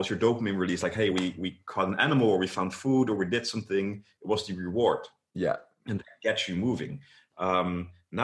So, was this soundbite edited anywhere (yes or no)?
no